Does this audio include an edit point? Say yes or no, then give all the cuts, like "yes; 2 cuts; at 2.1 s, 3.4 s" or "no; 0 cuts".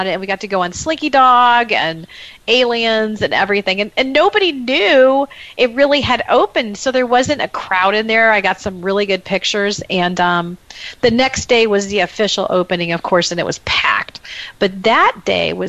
no; 0 cuts